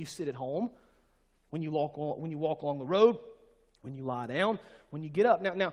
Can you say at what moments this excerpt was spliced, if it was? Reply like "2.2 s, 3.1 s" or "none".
none